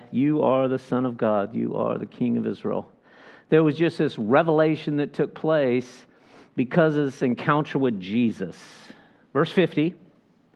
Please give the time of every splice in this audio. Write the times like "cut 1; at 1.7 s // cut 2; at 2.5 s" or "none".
none